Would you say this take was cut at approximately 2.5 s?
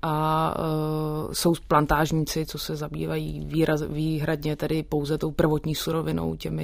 no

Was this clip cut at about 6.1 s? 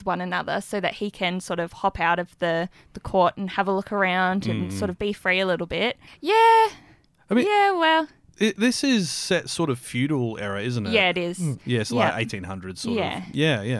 yes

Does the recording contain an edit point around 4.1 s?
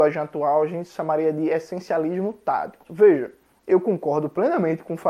no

